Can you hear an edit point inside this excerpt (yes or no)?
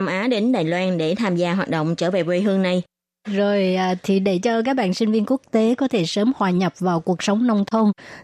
yes